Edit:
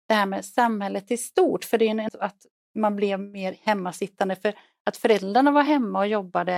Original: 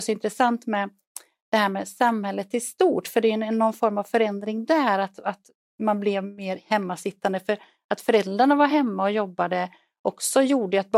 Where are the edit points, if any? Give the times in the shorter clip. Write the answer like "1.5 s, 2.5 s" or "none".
2.1 s